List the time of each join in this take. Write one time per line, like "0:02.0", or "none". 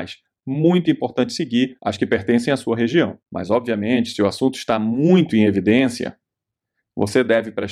0:03.2